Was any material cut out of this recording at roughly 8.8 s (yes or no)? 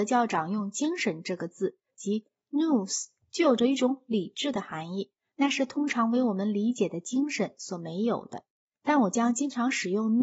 no